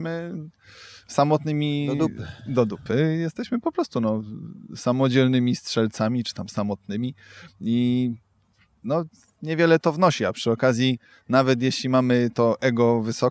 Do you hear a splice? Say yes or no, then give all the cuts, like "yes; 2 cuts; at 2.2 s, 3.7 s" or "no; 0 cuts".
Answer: no; 0 cuts